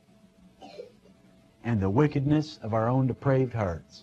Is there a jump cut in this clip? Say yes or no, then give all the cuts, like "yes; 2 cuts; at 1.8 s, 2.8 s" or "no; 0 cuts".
yes; 1 cut; at 1.5 s